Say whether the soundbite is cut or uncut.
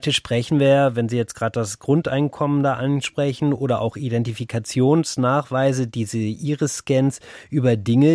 uncut